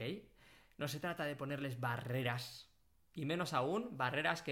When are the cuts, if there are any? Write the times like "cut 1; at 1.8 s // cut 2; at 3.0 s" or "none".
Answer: none